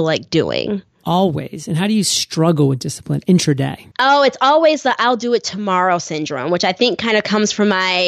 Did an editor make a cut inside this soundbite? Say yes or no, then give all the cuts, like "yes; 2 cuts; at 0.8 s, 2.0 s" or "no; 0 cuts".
yes; 1 cut; at 3.9 s